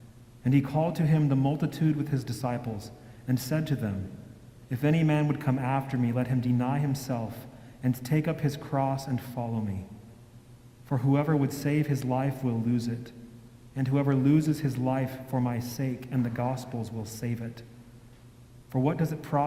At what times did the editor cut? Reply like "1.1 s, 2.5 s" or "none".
none